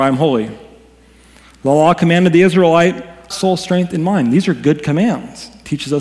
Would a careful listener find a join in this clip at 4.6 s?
no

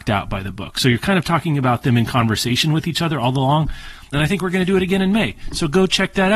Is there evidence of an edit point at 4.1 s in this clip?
yes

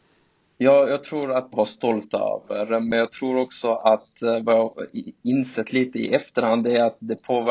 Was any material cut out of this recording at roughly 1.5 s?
yes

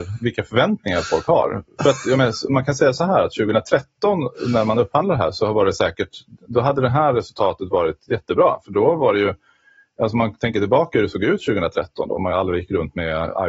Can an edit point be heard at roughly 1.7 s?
no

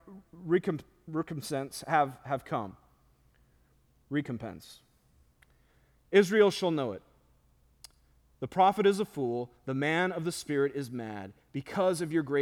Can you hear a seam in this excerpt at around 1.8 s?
no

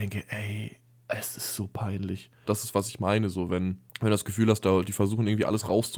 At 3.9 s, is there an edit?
yes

